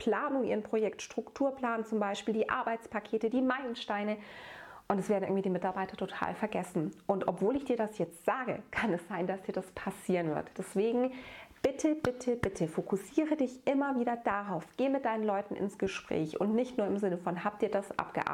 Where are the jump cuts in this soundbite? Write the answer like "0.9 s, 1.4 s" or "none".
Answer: none